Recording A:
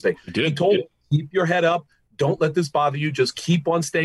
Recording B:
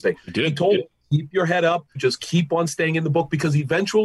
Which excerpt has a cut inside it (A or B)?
B